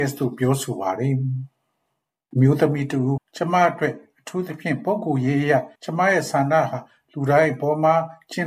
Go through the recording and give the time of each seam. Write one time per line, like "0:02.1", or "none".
0:03.2
0:05.7